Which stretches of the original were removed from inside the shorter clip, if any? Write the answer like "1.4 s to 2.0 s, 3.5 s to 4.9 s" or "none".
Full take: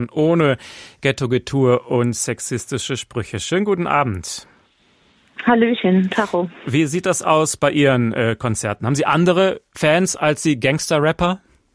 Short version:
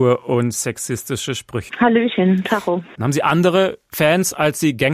3.3 s to 5.4 s, 6.6 s to 8.8 s